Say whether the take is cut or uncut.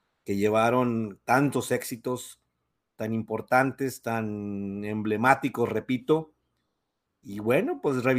uncut